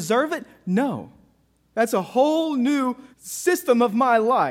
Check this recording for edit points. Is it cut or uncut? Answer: cut